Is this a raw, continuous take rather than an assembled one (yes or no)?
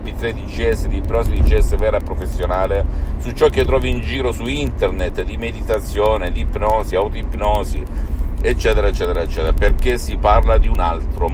yes